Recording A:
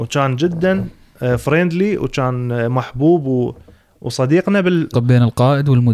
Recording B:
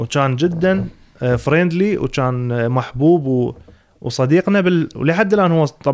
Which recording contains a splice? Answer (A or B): A